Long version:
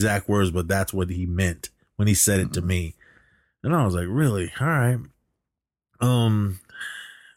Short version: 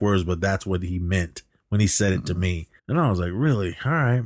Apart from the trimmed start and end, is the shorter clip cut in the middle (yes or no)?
yes